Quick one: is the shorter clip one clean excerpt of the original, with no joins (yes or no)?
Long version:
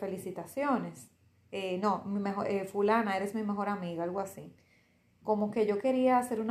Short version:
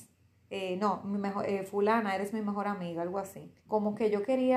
no